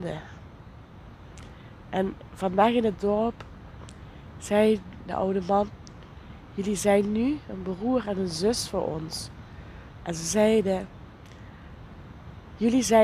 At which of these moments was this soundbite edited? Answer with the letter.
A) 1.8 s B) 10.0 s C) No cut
B